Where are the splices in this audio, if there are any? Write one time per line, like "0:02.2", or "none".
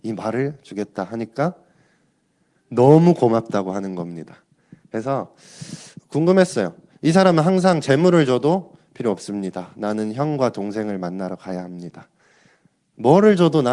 0:06.0